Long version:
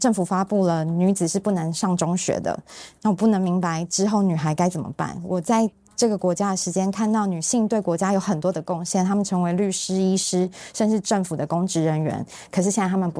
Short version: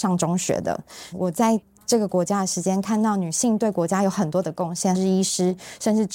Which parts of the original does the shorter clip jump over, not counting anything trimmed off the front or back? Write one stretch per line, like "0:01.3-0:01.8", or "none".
0:02.9-0:05.2
0:09.0-0:09.9